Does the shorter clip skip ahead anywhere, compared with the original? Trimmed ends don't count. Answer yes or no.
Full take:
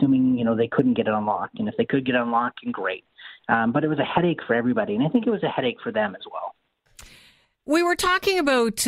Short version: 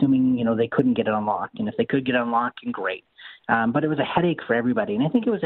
no